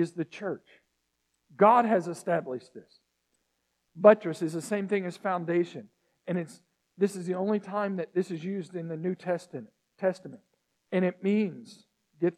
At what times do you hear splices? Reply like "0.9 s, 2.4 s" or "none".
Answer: none